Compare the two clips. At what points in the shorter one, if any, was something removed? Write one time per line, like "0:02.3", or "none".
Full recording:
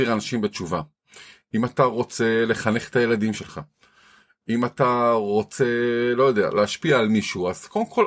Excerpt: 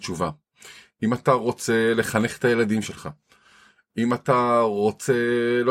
none